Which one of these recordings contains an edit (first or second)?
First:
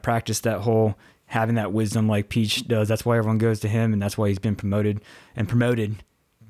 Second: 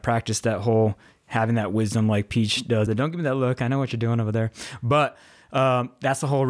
second